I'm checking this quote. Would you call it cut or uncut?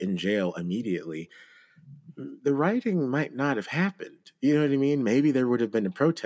uncut